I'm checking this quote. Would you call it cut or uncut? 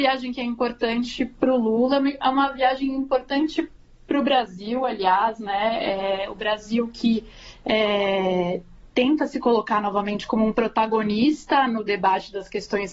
uncut